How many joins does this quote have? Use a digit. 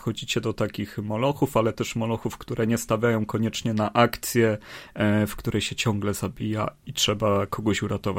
2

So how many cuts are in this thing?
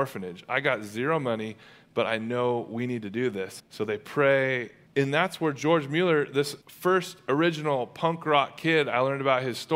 3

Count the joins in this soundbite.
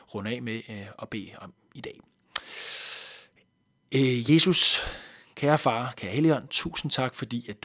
0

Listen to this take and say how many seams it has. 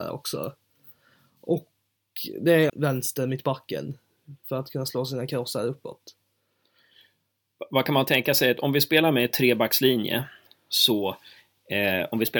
1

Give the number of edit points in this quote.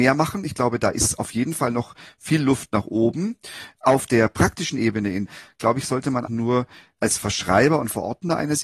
1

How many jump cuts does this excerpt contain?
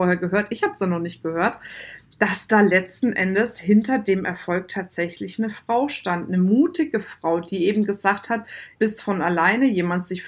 1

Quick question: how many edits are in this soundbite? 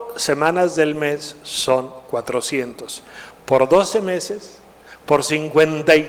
0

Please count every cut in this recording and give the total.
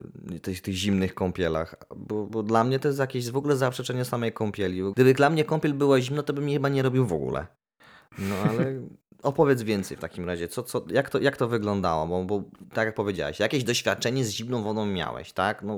1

